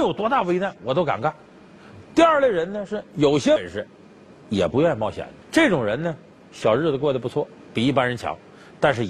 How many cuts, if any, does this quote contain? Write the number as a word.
two